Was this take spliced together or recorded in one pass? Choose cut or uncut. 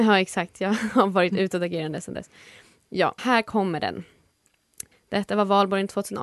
cut